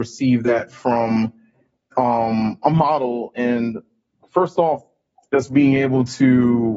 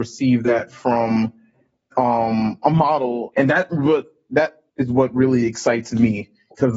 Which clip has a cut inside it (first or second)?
second